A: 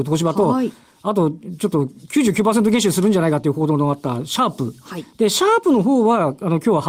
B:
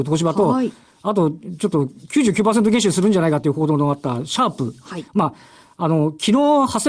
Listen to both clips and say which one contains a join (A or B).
B